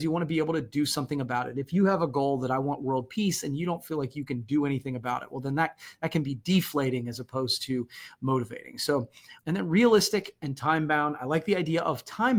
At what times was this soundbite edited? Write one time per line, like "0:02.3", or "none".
0:09.4